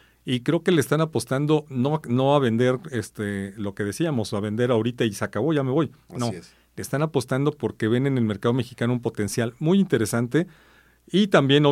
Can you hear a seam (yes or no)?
no